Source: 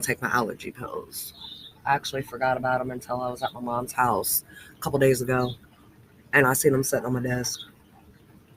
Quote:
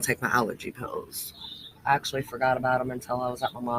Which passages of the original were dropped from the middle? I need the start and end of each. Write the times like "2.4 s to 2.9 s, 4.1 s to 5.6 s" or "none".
none

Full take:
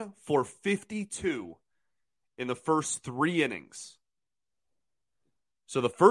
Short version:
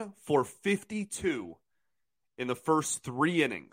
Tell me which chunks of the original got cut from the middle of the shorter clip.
none

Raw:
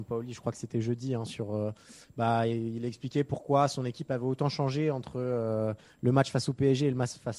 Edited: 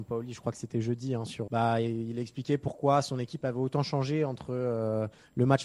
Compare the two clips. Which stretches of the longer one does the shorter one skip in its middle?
1.5 s to 2.1 s

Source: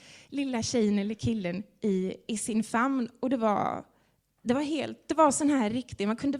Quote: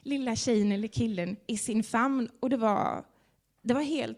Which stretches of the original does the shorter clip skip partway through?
1.7 s to 2.3 s

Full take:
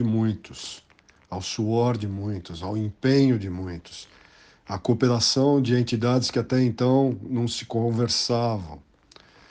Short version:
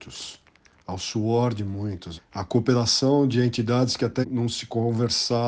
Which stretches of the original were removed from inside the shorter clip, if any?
2.6 s to 4.5 s, 6.5 s to 7.2 s

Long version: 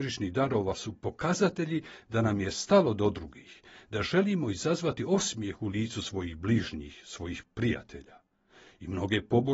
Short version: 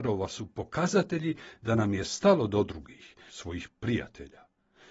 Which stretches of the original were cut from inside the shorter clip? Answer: 3.7 s to 7.0 s

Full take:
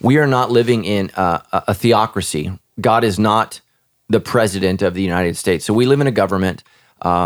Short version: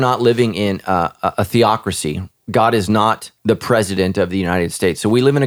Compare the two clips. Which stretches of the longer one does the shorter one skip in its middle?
3.7 s to 4.0 s

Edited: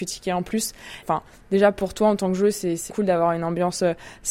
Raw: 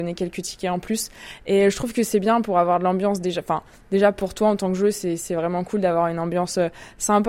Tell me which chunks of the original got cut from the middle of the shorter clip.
1.4 s to 3.4 s, 5.3 s to 5.6 s

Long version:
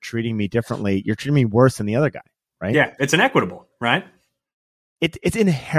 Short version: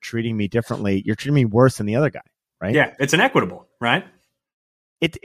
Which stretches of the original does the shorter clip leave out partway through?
none

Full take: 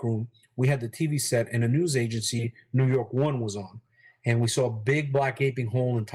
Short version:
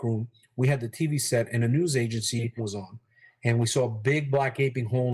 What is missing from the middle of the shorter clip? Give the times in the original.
2.6 s to 3.4 s

